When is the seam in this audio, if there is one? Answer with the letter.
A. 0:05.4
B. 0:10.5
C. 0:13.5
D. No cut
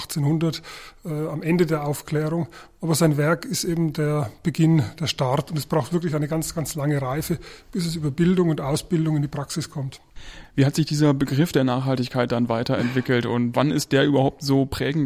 C